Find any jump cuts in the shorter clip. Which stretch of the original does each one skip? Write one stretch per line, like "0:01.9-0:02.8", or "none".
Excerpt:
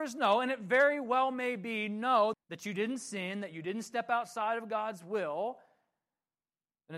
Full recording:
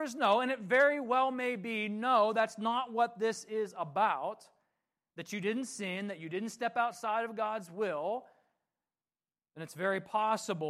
0:02.3-0:05.0